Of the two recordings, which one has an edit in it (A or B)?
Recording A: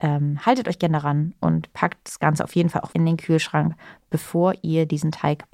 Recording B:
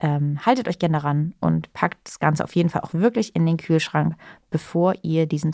A